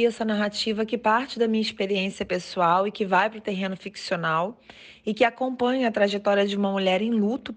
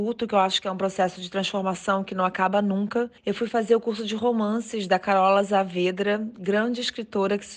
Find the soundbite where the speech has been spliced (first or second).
second